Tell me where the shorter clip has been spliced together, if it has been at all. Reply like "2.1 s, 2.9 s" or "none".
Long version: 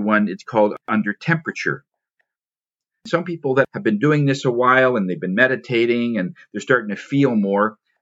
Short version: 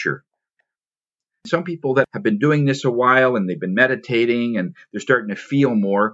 none